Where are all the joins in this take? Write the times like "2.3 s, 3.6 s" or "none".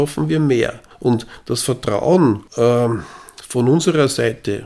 0.9 s, 2.5 s

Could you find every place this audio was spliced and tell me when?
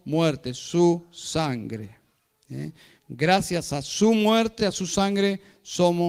none

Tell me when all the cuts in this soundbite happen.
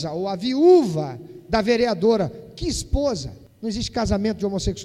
none

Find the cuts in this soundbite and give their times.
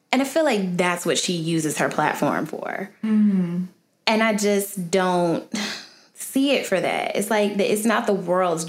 none

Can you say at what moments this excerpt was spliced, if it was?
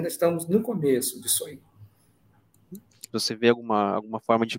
3.1 s

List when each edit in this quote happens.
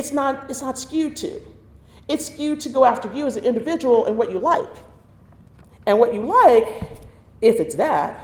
none

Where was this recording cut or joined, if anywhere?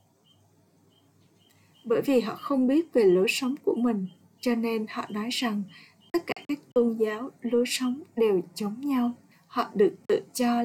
9.3 s

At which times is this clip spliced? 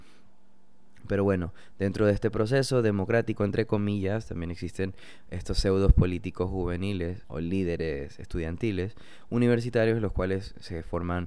7.2 s

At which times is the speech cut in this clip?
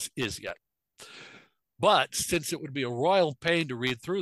none

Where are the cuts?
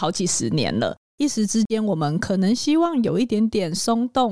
none

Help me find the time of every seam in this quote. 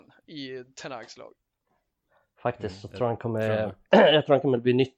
none

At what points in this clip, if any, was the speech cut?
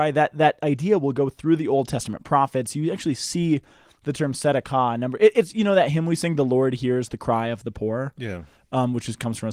none

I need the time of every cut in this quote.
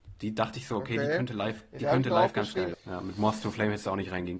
2.7 s

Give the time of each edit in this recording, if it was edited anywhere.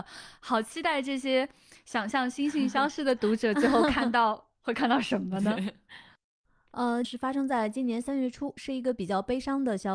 7.0 s

